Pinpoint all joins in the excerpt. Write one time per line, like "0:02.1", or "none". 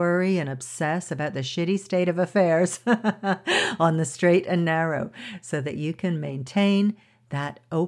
none